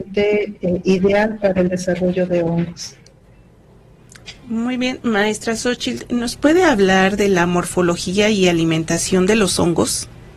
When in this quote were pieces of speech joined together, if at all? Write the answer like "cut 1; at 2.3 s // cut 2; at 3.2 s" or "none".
none